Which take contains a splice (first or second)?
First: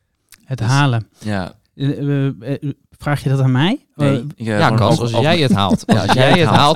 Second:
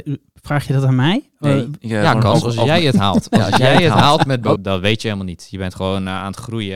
second